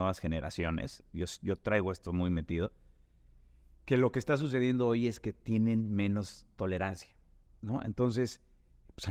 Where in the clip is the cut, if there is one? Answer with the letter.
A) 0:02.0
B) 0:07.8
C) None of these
C